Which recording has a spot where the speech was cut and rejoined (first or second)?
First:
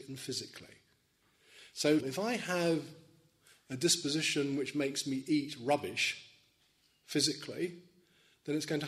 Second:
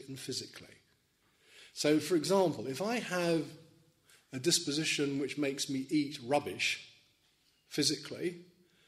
first